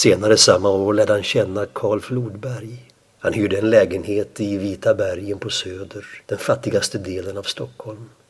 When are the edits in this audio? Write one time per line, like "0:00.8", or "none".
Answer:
0:03.1
0:06.2